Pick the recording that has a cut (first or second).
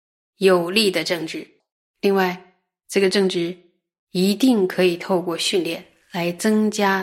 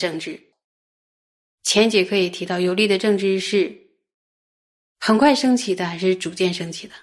first